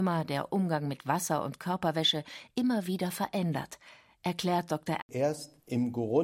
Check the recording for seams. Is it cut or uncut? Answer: cut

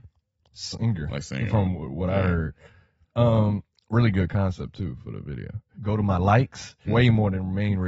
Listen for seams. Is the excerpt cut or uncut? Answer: cut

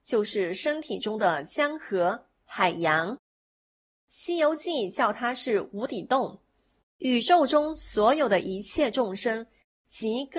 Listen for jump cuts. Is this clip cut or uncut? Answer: cut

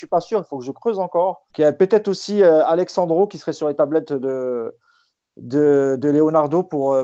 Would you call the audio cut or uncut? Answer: cut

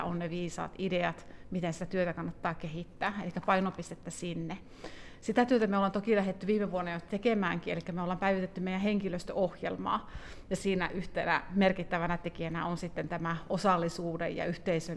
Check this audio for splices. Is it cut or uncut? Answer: uncut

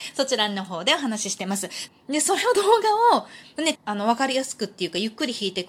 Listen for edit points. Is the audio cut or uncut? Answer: cut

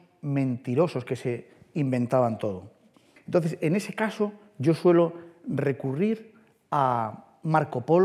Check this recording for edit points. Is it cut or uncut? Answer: cut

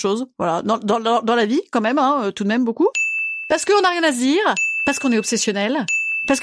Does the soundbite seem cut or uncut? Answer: uncut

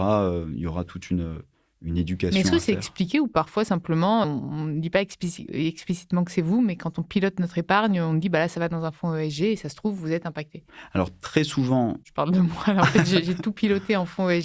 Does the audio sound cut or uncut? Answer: cut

